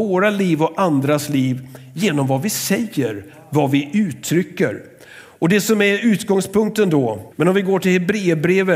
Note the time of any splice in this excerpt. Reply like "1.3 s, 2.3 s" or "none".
7.3 s